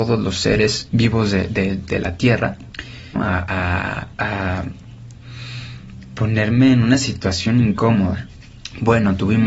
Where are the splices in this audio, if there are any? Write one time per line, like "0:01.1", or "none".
0:03.2

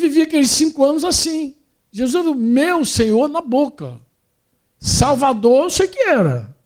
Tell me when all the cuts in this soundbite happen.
none

